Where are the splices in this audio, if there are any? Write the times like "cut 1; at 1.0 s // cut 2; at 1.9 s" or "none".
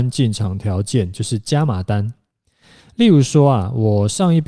none